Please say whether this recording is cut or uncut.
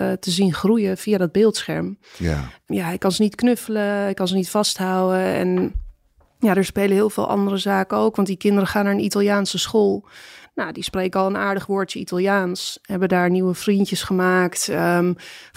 uncut